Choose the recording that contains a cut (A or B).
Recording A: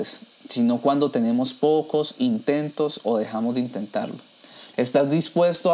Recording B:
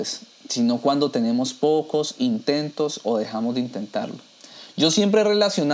A